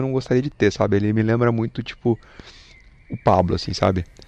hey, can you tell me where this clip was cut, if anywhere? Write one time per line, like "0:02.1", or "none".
none